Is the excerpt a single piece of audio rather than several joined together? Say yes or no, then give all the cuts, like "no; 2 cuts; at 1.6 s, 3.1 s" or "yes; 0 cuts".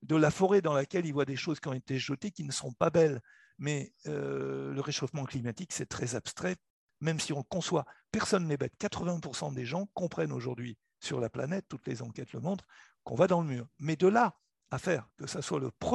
yes; 0 cuts